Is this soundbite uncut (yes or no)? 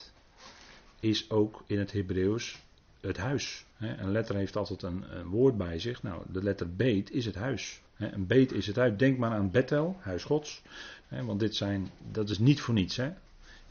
no